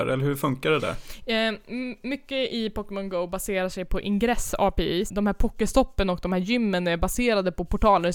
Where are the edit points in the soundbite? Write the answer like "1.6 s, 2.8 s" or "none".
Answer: 5.1 s